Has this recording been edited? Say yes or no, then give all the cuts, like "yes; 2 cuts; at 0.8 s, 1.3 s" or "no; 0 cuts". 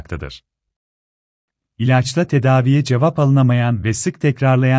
no; 0 cuts